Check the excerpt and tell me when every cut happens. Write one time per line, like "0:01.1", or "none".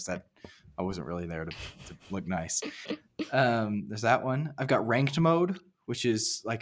none